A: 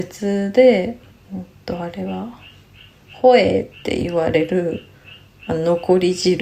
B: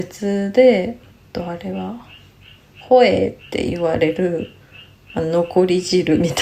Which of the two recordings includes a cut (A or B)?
B